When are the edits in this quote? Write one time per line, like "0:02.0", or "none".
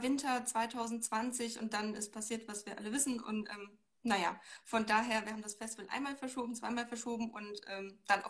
none